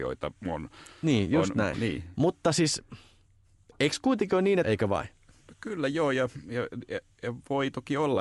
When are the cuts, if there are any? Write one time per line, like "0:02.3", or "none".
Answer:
0:01.7
0:04.6